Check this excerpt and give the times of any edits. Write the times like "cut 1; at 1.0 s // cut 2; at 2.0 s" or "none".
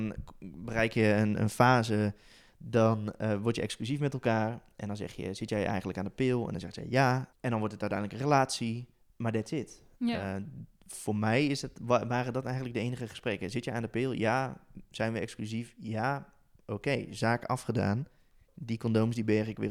cut 1; at 7.3 s